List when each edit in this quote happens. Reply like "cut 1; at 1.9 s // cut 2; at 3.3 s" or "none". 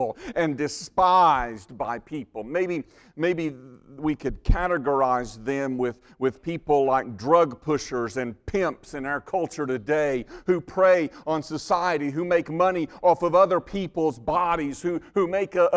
none